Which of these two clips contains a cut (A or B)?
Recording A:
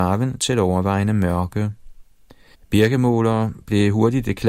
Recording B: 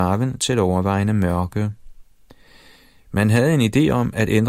A